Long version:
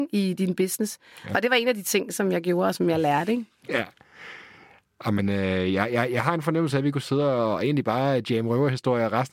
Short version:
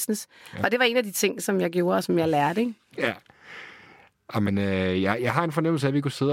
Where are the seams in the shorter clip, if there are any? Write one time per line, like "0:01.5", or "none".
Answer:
0:05.2